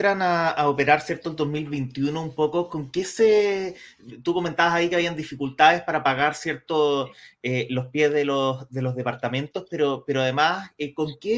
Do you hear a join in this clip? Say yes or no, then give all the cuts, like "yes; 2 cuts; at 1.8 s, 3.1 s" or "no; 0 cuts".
no; 0 cuts